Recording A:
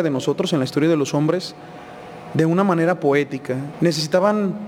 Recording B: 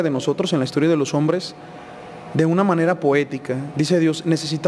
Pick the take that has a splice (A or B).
A